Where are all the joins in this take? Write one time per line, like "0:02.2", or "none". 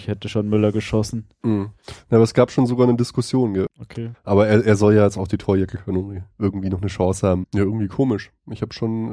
0:03.7
0:07.4